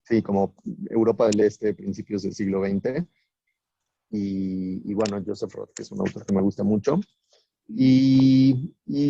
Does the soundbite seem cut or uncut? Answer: uncut